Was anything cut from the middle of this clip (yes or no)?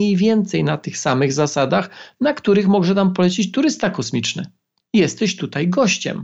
yes